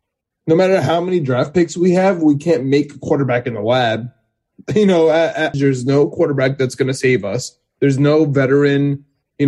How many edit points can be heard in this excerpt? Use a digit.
1